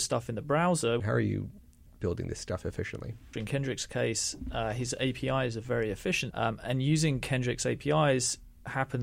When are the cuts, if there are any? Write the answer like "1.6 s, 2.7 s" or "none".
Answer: 1.0 s, 3.3 s, 6.3 s

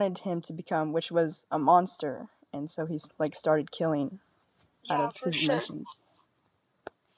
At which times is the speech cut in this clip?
none

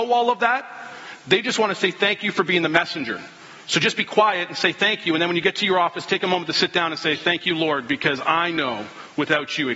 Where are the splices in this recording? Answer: none

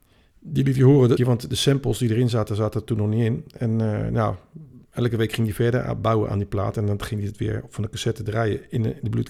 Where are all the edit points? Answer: 1.2 s

